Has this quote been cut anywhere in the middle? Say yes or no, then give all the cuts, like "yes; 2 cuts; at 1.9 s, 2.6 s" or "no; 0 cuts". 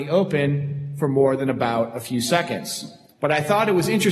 yes; 1 cut; at 3.1 s